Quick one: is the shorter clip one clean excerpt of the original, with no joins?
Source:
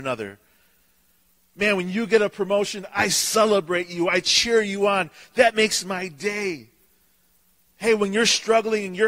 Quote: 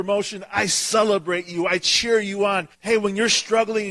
no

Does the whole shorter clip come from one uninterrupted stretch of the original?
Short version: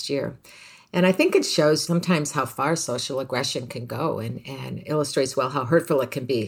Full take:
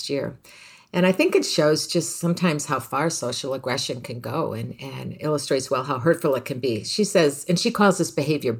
no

